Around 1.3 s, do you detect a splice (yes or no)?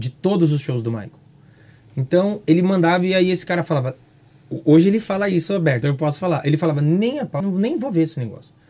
no